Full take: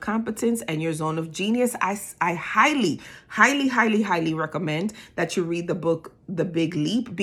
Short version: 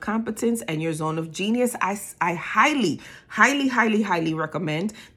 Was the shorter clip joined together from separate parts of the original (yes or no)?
no